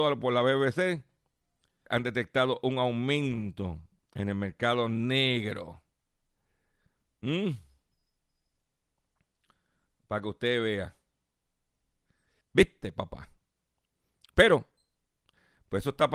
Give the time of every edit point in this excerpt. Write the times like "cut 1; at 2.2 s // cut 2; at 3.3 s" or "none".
cut 1; at 1.9 s // cut 2; at 12.4 s